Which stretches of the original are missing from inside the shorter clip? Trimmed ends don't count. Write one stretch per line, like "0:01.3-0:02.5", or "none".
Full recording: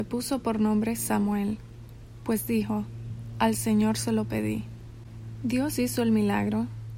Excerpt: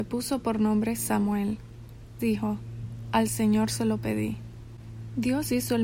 0:02.2-0:02.5